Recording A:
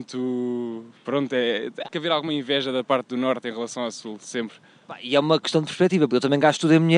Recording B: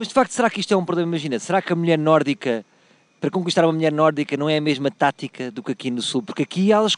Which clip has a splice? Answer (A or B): A